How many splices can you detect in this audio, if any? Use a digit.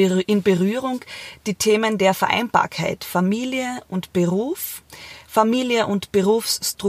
0